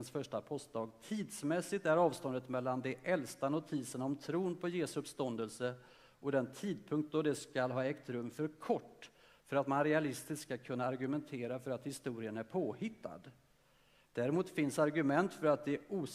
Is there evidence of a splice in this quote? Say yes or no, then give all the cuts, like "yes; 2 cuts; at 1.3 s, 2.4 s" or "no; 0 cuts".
no; 0 cuts